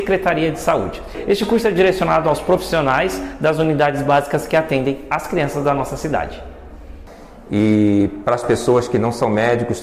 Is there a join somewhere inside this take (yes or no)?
no